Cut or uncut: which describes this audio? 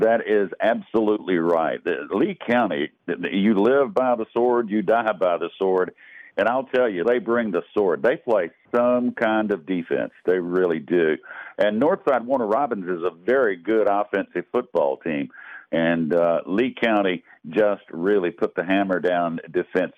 cut